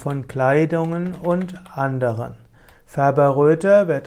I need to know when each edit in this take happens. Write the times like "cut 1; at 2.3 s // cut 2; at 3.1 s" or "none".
cut 1; at 2.7 s